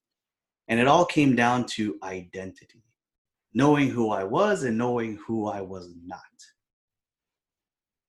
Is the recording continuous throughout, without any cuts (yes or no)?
yes